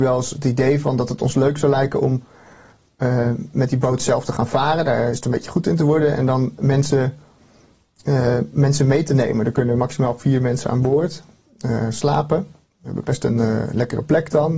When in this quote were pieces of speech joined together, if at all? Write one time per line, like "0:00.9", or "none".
none